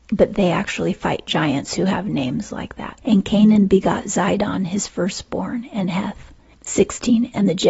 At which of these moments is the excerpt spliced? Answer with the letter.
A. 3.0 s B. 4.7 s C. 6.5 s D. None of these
A